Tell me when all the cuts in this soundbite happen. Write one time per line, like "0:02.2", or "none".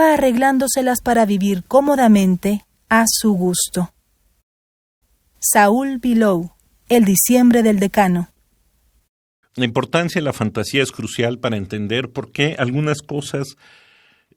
none